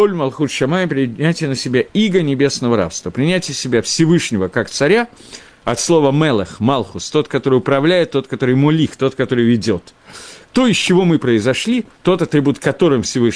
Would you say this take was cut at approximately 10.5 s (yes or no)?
yes